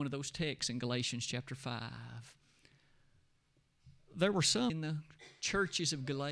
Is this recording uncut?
no; 1 cut; at 4.7 s

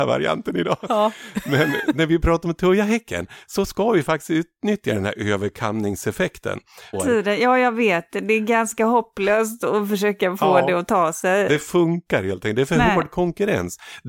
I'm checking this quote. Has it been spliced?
yes; 1 cut; at 6.9 s

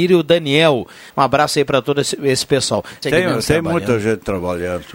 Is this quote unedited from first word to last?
no; 2 cuts; at 1.1 s, 3.0 s

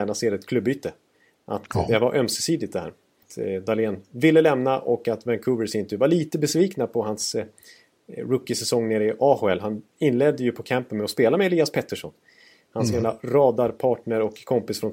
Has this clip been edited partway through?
no; 0 cuts

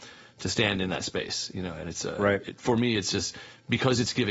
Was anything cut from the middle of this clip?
no; 0 cuts

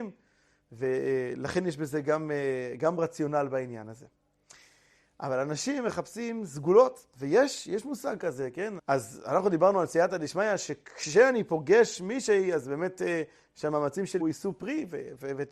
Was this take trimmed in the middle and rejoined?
yes; 2 cuts; at 8.8 s, 14.2 s

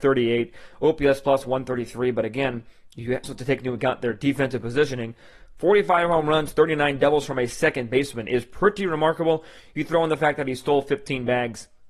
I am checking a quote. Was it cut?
yes; 1 cut; at 3.2 s

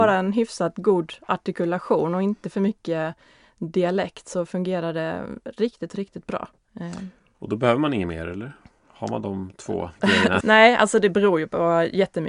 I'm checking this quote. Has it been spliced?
yes; 2 cuts; at 6.6 s, 10.4 s

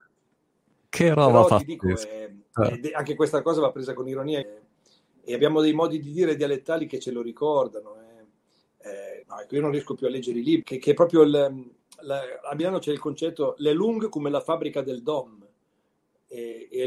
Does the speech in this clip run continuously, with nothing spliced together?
no; 3 cuts; at 4.4 s, 9.2 s, 10.6 s

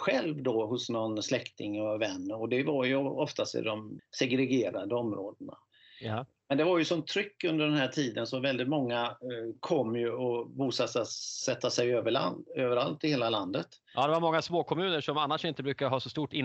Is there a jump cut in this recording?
yes; 1 cut; at 4.0 s

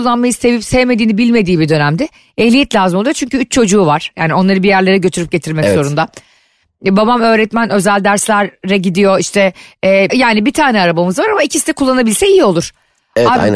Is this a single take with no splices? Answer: no; 1 cut; at 10.1 s

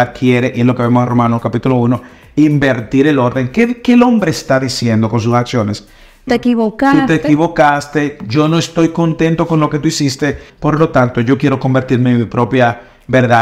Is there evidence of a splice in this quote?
yes; 2 cuts; at 6.3 s, 10.5 s

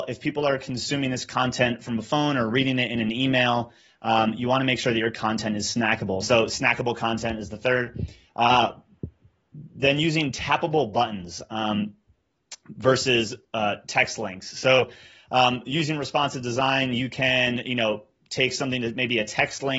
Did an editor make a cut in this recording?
yes; 1 cut; at 6.2 s

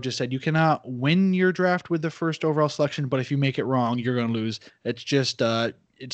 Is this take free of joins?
no; 1 cut; at 4.7 s

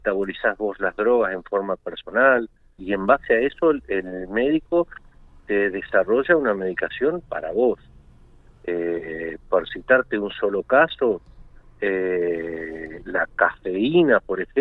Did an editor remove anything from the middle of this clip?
yes; 1 cut; at 2.8 s

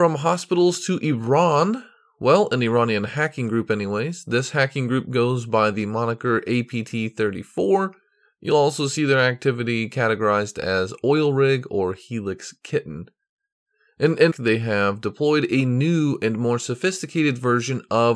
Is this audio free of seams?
no; 1 cut; at 14.3 s

